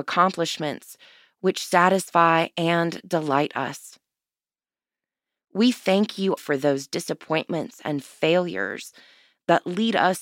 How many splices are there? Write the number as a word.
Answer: one